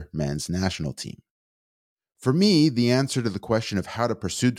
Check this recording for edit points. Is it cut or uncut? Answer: uncut